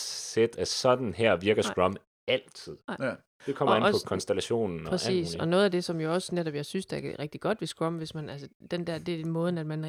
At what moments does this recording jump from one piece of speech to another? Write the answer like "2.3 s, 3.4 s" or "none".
none